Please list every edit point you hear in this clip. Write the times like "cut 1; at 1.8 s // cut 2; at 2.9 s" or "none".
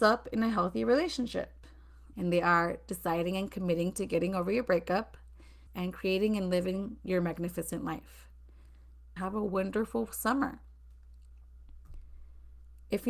cut 1; at 2.1 s // cut 2; at 5.7 s // cut 3; at 9.2 s